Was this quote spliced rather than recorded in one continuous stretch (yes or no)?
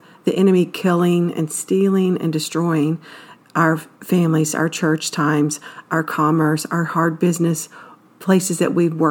no